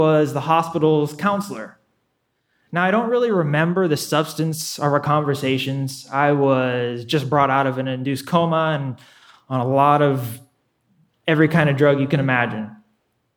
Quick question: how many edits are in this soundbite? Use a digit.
0